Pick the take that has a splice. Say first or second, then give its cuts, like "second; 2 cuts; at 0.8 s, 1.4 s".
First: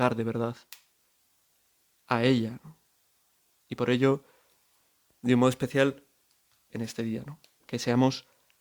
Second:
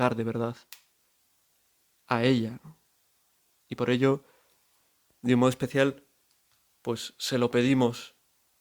first; 1 cut; at 6.7 s